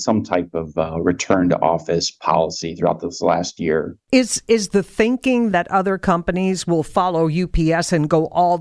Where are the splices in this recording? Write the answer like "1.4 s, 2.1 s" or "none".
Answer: 4.0 s, 5.5 s